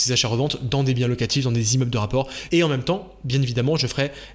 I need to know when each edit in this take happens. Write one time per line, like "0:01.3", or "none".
0:02.5